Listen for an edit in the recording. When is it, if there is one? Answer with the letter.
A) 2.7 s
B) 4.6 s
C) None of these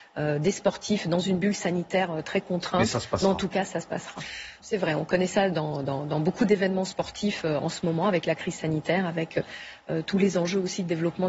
B